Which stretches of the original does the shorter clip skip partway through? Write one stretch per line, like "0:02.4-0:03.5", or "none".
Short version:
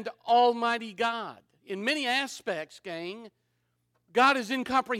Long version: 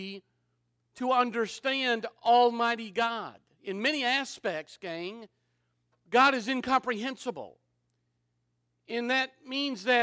none